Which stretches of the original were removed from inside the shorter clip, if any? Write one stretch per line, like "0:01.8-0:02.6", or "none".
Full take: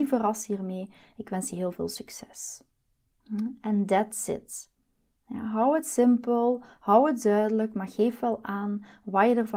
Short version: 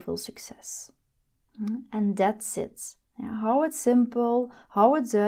0:04.8-0:05.2